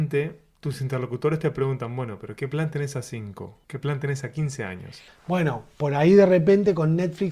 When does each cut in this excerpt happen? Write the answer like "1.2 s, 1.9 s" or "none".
3.6 s, 5.1 s